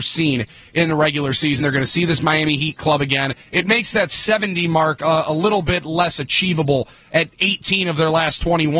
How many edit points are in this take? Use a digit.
2